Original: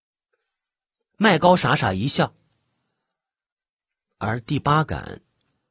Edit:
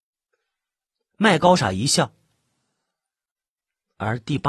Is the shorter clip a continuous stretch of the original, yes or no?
no